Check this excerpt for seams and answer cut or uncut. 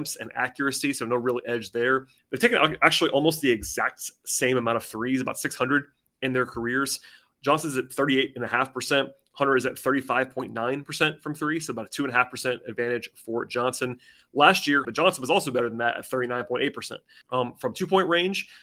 cut